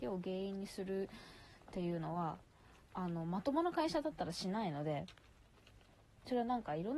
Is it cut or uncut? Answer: uncut